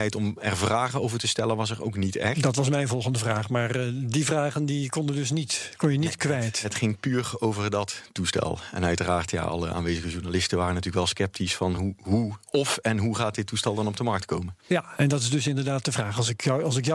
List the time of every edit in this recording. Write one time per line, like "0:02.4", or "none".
none

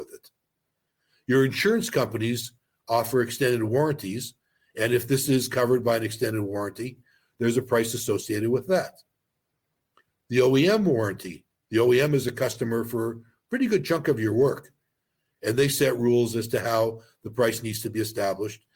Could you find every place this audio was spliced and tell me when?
none

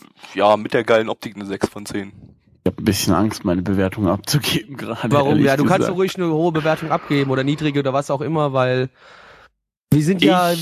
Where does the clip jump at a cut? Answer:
0:02.6

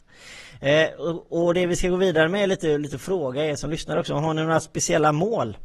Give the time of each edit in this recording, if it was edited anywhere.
none

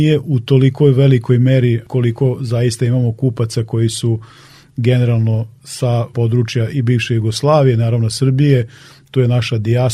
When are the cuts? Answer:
none

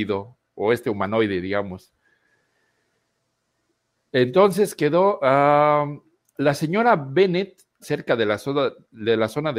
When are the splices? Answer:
0:07.8

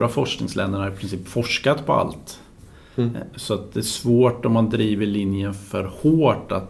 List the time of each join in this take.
none

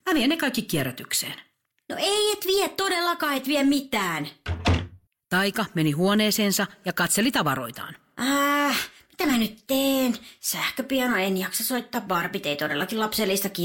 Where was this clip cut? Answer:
none

